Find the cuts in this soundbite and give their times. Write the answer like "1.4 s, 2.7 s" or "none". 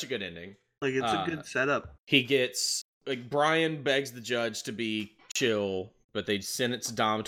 2.0 s, 6.0 s